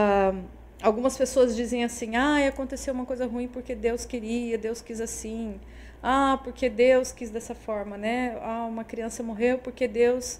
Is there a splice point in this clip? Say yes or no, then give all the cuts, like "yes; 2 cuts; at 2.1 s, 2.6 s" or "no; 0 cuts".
no; 0 cuts